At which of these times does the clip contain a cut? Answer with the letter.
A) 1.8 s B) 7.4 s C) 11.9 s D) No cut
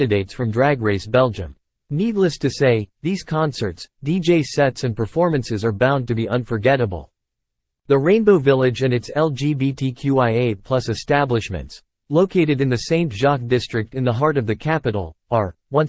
A